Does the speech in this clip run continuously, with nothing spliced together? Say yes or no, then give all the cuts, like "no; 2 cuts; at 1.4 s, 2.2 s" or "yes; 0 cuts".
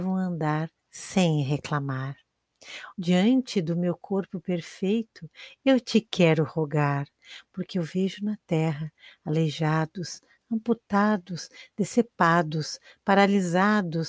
no; 1 cut; at 2.9 s